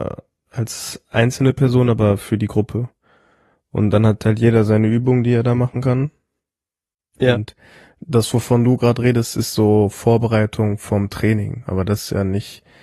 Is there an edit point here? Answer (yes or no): no